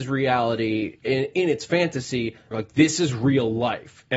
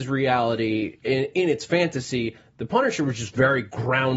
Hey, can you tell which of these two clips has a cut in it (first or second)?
first